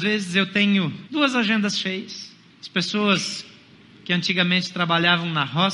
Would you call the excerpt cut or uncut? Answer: cut